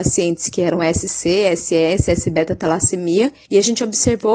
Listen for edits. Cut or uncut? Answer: uncut